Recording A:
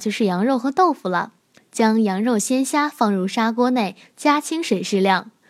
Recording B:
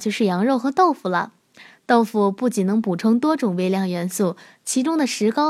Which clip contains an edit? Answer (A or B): A